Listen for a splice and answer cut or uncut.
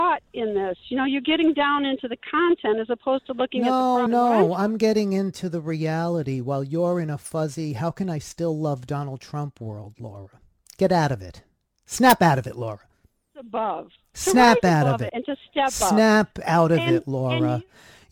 cut